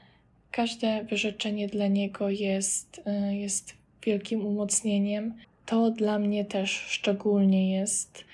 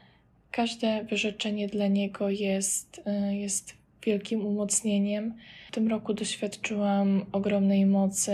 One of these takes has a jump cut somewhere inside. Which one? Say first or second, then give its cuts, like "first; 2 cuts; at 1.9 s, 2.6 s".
first; 1 cut; at 5.4 s